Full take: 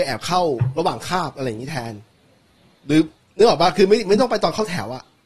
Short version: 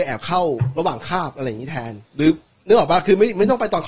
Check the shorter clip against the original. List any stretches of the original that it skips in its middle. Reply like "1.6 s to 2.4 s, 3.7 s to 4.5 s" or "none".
2.1 s to 2.8 s